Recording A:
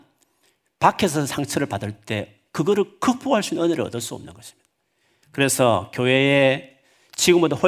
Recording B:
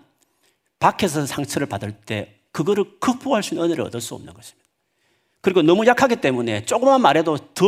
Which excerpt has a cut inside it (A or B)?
A